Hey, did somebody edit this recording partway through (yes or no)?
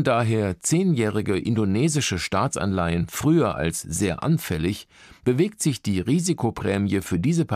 no